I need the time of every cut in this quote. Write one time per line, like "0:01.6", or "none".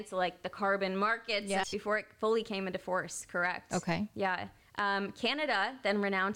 0:01.6
0:04.6

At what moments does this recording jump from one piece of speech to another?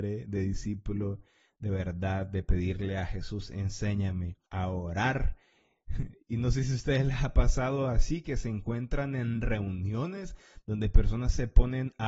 0:04.5

